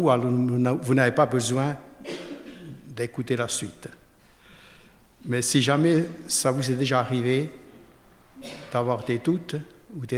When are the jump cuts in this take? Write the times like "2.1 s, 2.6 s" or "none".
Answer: none